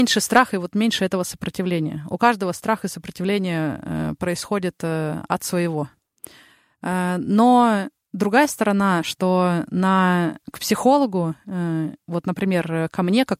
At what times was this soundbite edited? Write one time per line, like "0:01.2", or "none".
none